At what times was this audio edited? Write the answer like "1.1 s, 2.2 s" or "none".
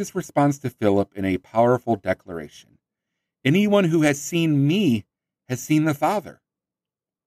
none